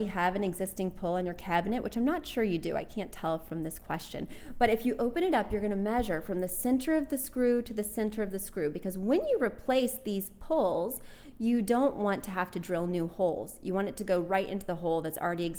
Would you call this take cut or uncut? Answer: uncut